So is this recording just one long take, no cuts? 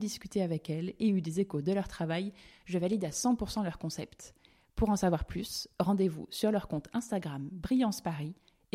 yes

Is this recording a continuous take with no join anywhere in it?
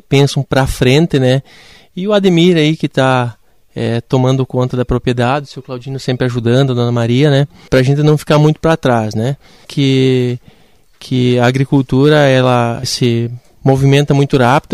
no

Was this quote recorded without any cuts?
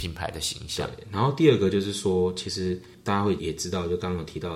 no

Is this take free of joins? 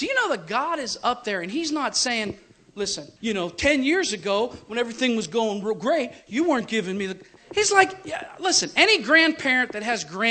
no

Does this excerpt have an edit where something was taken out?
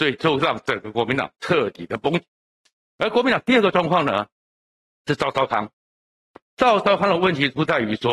no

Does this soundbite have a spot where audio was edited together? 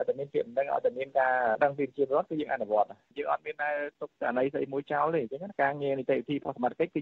yes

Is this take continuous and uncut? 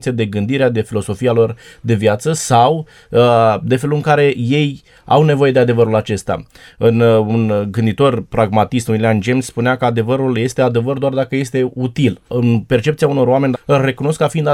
no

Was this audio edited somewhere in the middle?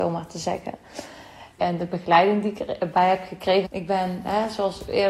yes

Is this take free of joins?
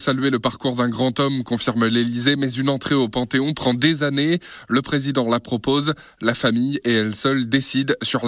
yes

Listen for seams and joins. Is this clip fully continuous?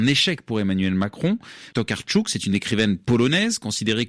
no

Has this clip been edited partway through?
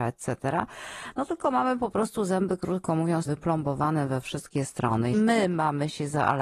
yes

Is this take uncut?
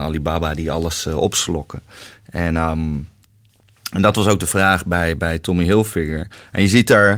yes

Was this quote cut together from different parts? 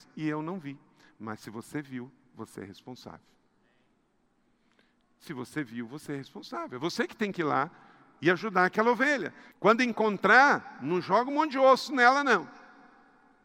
yes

